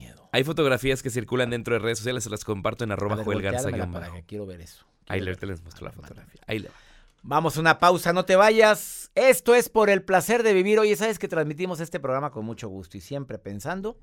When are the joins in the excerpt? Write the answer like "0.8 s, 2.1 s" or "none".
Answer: none